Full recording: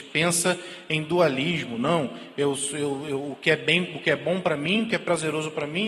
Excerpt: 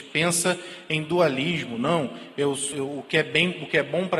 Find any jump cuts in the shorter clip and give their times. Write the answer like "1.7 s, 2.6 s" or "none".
2.7 s